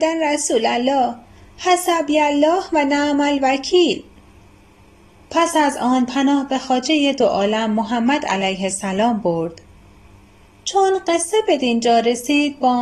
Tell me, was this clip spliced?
no; 0 cuts

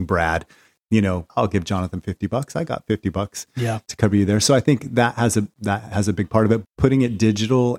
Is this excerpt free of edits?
no; 2 cuts; at 1.3 s, 6.6 s

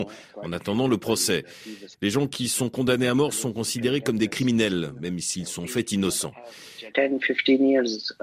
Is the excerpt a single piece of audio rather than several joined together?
no; 2 cuts; at 1.9 s, 6.9 s

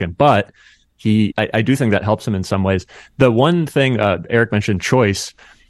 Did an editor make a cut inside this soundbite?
yes; 1 cut; at 1.3 s

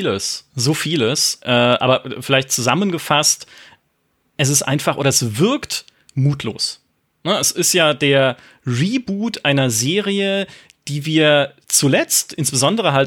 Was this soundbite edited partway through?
yes; 1 cut; at 1.4 s

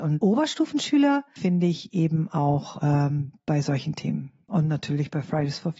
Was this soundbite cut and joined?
no; 0 cuts

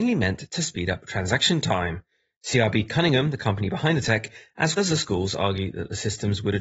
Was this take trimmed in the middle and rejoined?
yes; 1 cut; at 4.8 s

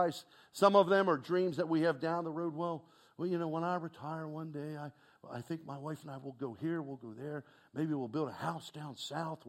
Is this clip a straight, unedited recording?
yes; 0 cuts

